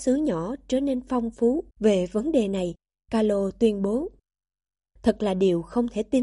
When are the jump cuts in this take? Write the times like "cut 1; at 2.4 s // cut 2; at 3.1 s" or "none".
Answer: cut 1; at 1.7 s